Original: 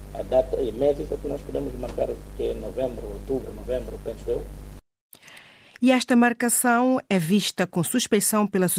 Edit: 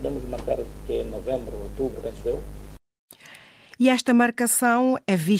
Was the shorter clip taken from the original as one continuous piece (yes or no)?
no